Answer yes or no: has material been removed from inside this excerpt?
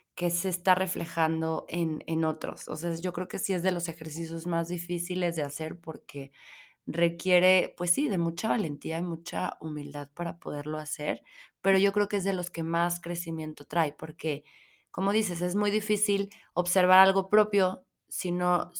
no